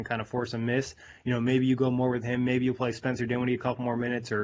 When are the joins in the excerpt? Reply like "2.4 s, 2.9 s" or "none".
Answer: none